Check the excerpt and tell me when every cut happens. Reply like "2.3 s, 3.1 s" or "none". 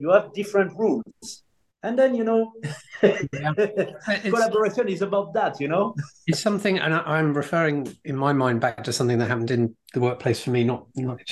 none